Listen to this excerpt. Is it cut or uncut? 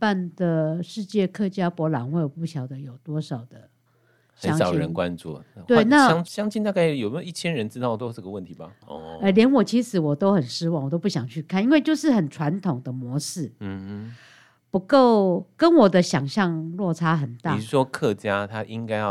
cut